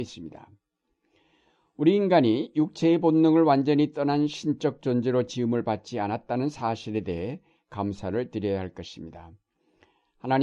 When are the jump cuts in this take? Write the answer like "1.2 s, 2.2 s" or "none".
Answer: none